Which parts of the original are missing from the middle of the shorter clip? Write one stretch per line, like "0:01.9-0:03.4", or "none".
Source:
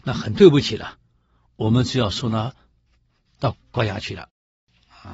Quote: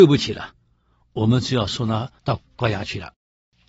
0:02.6-0:03.3